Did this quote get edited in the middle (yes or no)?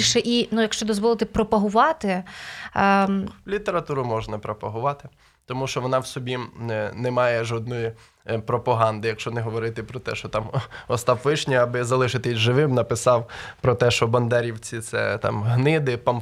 no